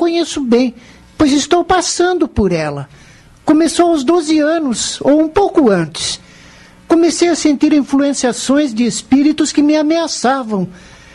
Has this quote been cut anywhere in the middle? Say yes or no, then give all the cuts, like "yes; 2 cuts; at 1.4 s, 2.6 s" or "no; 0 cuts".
no; 0 cuts